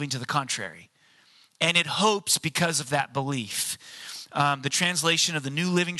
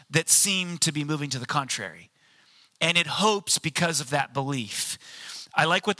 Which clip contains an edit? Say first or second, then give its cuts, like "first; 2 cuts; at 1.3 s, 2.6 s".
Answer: first; 1 cut; at 4.3 s